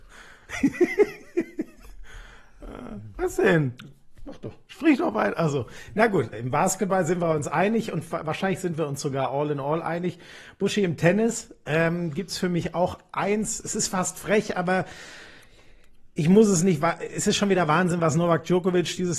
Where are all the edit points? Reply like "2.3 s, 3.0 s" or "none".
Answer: 6.3 s